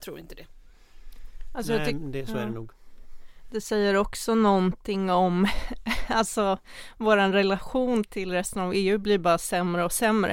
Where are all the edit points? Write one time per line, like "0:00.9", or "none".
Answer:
none